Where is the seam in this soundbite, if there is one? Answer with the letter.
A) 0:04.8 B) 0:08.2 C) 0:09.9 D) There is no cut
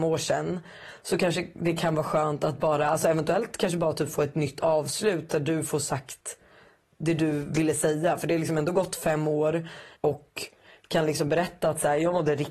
C